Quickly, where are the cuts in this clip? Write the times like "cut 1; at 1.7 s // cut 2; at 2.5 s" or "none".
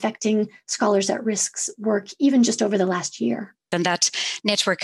cut 1; at 3.7 s